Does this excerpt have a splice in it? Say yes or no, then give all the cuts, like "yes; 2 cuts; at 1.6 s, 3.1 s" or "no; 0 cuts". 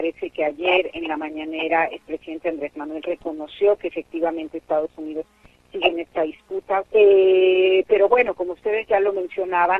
yes; 1 cut; at 6.8 s